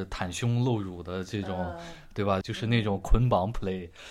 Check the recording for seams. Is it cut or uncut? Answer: cut